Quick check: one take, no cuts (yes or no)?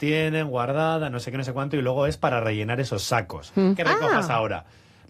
no